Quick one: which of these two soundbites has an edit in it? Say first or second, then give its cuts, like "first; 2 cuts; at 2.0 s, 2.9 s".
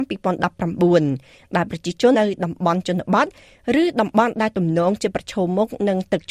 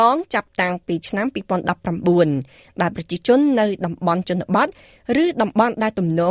first; 1 cut; at 2.1 s